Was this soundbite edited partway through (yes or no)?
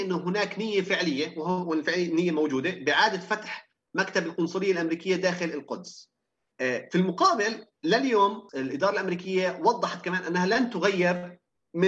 yes